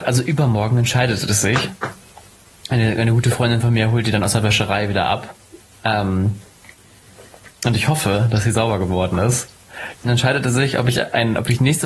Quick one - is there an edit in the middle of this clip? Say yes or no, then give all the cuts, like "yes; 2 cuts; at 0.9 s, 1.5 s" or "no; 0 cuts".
no; 0 cuts